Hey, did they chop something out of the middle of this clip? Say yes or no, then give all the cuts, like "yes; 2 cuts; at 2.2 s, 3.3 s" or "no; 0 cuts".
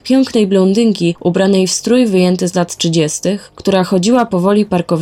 no; 0 cuts